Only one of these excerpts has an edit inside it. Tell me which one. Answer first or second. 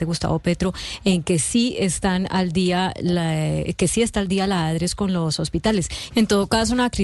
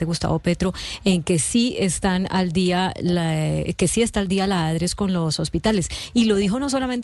first